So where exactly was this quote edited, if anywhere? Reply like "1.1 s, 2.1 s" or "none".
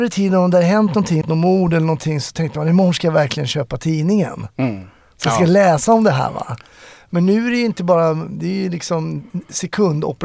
1.2 s